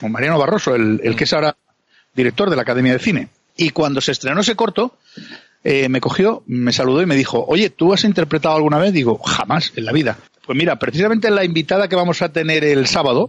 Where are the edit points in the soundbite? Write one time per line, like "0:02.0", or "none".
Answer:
0:10.3

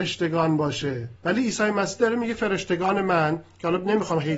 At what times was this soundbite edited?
0:01.2

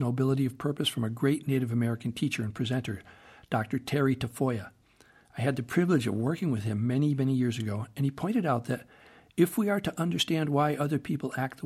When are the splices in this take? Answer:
none

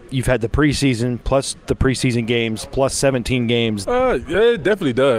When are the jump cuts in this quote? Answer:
0:03.8

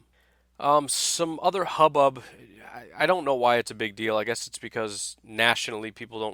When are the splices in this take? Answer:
none

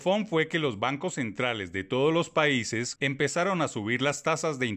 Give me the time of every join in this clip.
0:03.0

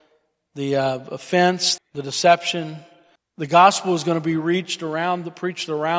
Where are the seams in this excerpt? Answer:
0:01.8
0:03.2

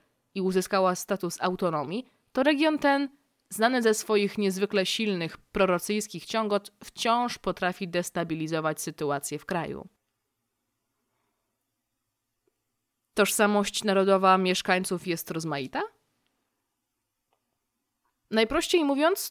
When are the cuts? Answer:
none

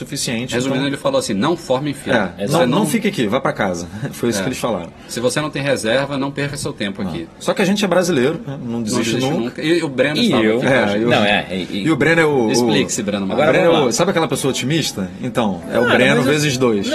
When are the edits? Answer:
none

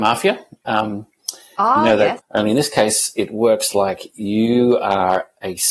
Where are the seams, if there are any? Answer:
0:02.2

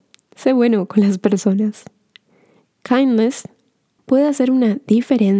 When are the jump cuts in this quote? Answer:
0:04.0

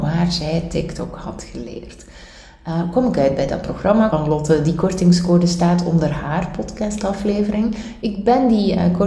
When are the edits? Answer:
0:04.1
0:08.0

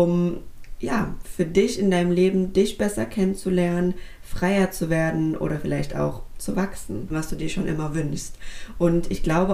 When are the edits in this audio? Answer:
0:07.1

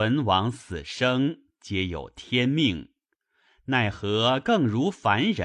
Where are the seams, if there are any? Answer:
none

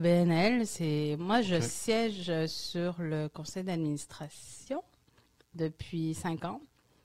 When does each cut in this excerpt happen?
none

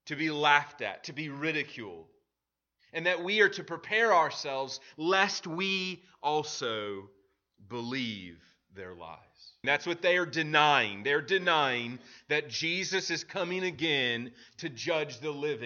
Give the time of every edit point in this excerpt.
0:09.6

